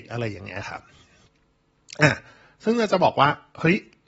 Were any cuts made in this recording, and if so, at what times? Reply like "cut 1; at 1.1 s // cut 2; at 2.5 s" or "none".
none